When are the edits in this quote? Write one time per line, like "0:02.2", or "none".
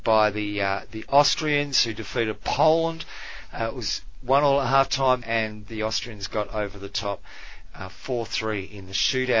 0:05.2